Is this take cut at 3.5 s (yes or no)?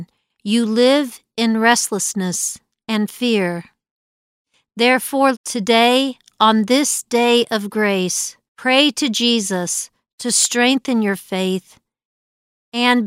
no